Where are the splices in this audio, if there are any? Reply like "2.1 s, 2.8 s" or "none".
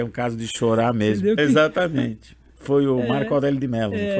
1.4 s